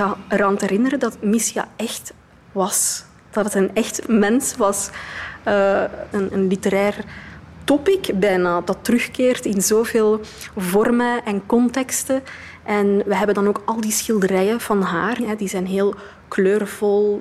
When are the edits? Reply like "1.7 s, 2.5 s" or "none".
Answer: 6.1 s, 15.2 s